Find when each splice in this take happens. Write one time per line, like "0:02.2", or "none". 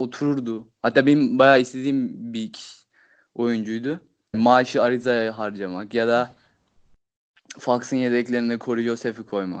0:04.3